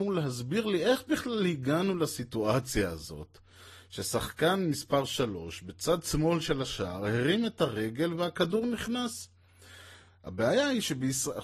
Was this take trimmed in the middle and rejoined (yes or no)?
no